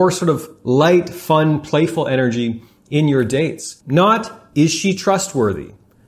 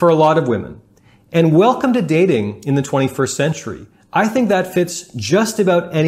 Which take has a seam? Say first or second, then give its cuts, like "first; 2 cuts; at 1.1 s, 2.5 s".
first; 1 cut; at 3.8 s